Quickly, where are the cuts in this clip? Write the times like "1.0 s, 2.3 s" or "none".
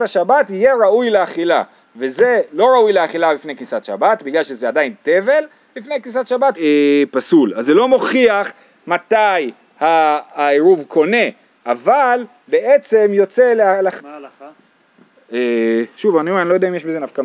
6.6 s, 14.0 s, 16.0 s